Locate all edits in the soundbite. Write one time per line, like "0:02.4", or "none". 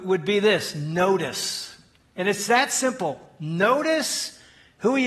none